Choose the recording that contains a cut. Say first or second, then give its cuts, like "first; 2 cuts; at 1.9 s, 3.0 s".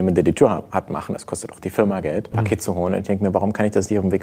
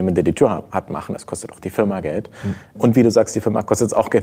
first; 1 cut; at 2.3 s